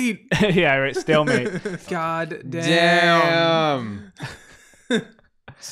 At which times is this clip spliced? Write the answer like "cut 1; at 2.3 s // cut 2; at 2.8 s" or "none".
cut 1; at 1.9 s